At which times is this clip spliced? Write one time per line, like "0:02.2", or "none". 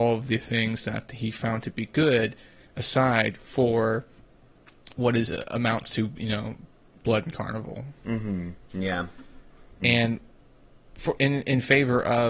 0:09.8
0:11.2